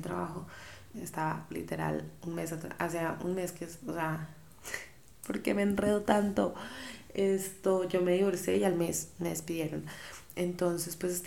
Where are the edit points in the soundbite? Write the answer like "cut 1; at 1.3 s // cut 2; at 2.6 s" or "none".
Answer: cut 1; at 0.9 s

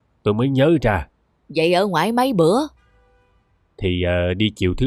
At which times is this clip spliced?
cut 1; at 1.4 s

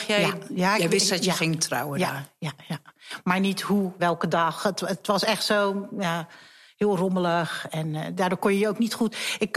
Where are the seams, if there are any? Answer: cut 1; at 4.0 s

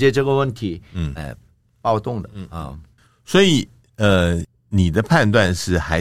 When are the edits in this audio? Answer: cut 1; at 1.2 s

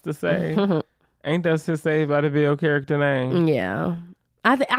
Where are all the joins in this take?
none

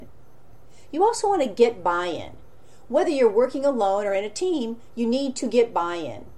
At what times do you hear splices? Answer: none

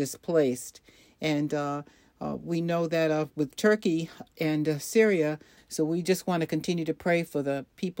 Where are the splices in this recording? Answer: cut 1; at 5.6 s

